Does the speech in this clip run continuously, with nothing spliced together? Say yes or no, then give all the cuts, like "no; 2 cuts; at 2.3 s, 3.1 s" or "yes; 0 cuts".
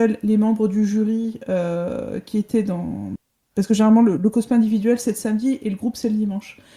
no; 1 cut; at 3.4 s